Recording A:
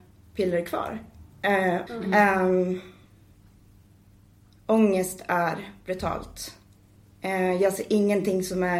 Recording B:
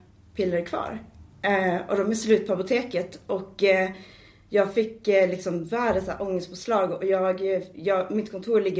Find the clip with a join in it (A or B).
A